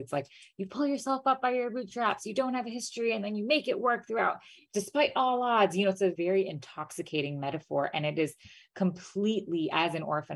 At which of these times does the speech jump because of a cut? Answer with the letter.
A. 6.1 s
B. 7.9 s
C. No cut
A